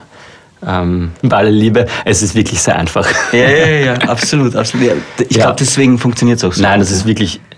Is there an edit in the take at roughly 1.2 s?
yes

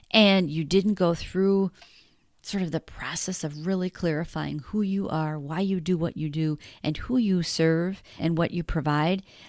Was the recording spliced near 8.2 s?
yes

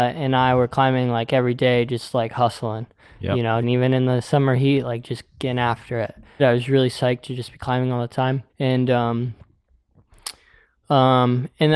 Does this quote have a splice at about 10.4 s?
no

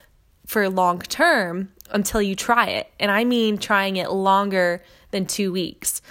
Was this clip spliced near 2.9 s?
no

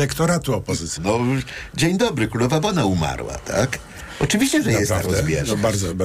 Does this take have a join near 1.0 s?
yes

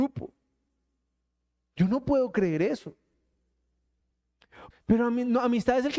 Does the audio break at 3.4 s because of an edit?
no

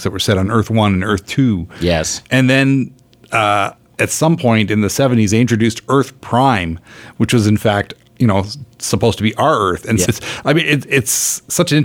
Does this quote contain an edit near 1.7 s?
no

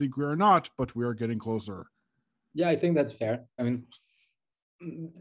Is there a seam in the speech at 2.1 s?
no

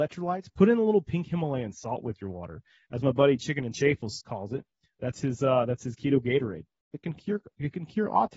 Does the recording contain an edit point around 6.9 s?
yes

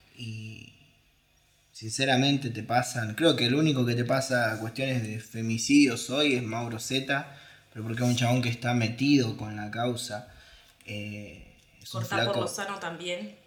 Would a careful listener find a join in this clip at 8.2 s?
no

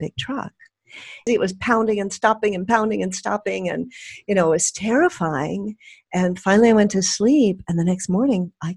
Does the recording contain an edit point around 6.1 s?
no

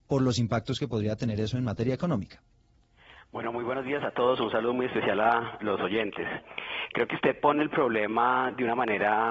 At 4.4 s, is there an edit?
no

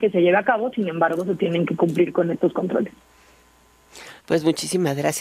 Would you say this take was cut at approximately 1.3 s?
no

